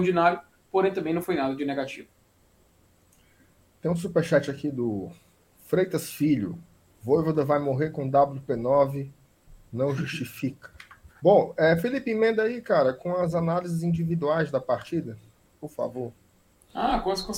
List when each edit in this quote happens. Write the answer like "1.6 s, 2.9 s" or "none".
11.2 s